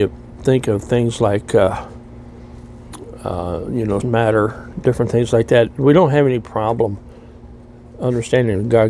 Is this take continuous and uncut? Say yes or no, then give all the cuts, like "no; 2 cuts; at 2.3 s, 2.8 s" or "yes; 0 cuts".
no; 1 cut; at 4.0 s